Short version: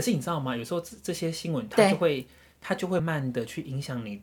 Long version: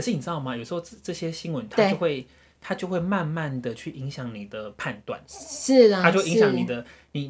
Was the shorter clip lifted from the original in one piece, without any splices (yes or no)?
no